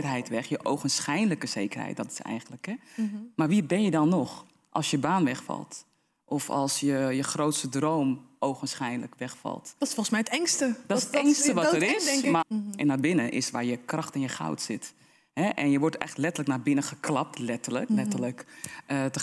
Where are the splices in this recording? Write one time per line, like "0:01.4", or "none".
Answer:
0:12.4
0:17.9